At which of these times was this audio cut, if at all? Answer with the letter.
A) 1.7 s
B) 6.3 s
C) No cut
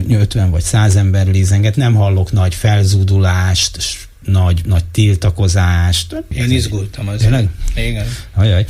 B